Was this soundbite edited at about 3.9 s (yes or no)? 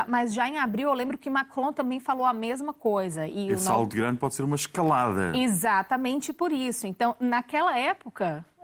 yes